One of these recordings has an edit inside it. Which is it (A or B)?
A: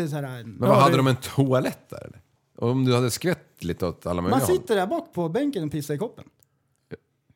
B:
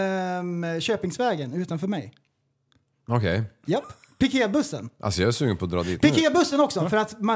A